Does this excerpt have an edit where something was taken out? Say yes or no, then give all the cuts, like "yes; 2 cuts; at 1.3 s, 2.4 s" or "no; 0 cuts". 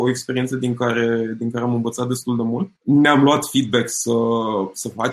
yes; 1 cut; at 2.8 s